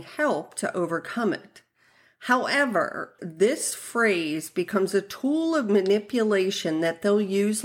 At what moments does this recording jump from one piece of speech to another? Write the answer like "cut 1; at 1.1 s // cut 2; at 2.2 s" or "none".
cut 1; at 3.2 s